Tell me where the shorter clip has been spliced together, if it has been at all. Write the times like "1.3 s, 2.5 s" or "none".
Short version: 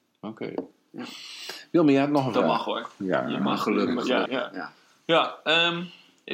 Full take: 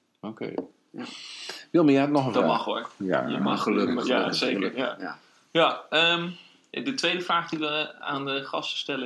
4.3 s